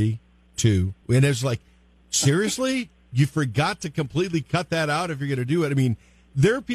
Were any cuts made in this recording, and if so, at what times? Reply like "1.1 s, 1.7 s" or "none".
1.0 s